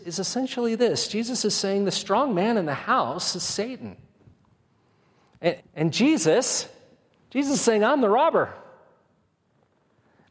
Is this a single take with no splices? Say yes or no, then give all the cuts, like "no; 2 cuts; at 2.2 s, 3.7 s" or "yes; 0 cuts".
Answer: no; 1 cut; at 5.6 s